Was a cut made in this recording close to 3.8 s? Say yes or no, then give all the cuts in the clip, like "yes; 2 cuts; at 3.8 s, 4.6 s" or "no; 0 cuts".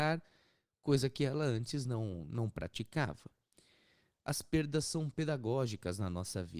no; 0 cuts